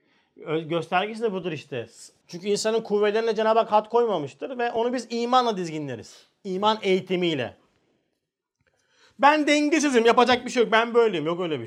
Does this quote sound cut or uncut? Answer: cut